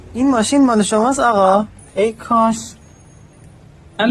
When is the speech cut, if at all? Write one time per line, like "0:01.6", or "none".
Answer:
0:01.8